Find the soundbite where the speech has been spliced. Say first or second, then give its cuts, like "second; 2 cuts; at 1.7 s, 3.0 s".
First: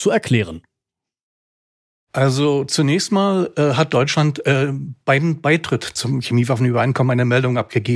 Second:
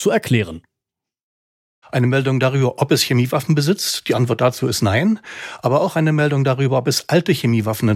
second; 1 cut; at 1.8 s